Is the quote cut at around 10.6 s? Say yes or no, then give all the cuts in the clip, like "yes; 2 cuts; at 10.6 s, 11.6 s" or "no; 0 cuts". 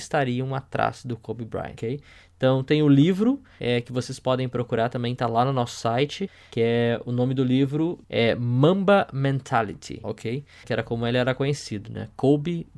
yes; 1 cut; at 10.6 s